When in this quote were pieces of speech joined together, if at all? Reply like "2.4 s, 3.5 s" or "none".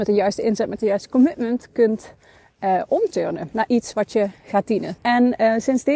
5.0 s